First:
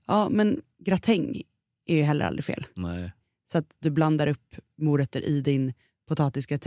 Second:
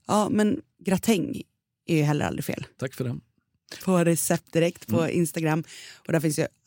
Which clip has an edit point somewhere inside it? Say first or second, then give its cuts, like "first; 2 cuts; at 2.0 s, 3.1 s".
second; 2 cuts; at 2.7 s, 3.8 s